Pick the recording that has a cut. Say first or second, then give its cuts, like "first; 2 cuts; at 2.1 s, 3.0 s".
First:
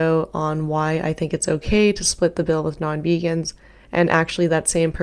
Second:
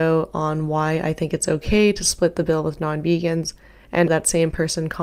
second; 1 cut; at 4.1 s